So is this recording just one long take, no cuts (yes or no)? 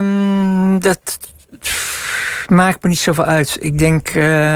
yes